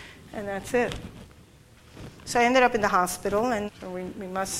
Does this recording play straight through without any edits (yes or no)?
no